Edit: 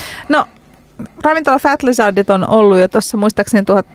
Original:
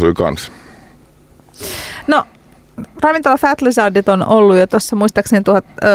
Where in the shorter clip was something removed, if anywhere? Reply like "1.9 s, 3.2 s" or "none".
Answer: none

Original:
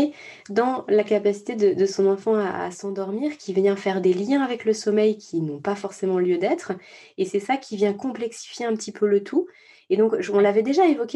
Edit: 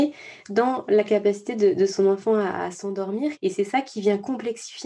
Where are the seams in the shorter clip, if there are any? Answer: 3.4 s

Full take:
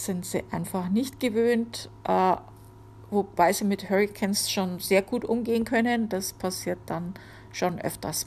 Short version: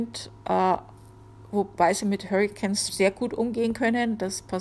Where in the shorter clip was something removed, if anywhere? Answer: 2.9 s

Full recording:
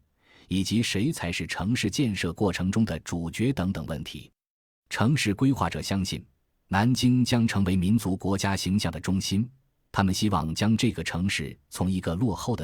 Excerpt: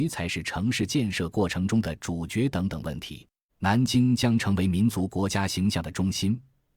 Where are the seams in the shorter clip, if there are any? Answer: 3.5 s

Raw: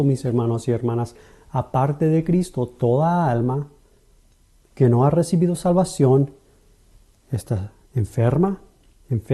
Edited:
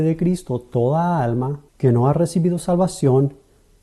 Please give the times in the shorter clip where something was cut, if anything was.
1.7 s

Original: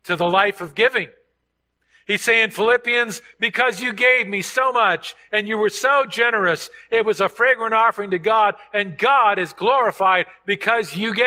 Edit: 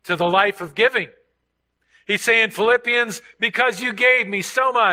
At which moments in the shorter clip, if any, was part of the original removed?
none

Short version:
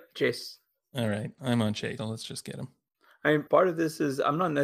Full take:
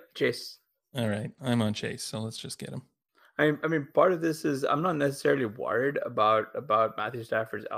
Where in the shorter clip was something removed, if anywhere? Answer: 2.0 s, 3.5 s

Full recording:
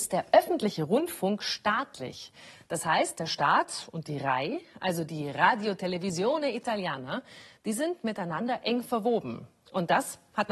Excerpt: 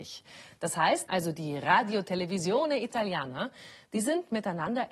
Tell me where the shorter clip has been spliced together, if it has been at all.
1.1 s

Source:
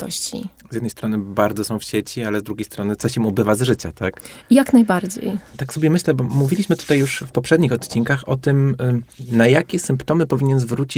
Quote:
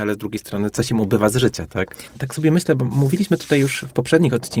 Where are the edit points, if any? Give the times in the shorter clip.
2.1 s

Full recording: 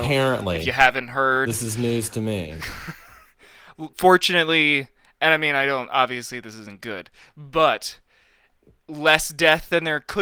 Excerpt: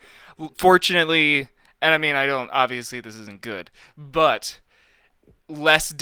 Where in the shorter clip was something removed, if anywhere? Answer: none

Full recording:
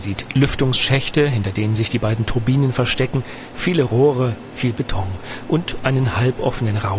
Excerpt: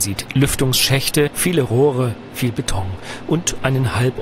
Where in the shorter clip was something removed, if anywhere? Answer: 1.3 s

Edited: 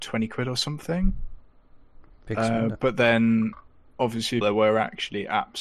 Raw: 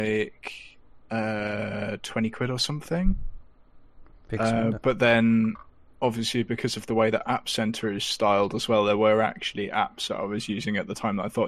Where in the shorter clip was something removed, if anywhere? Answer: 4.4 s

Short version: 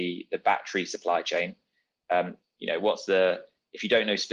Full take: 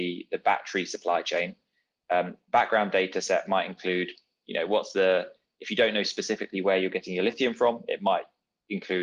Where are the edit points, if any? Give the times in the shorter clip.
2.4 s

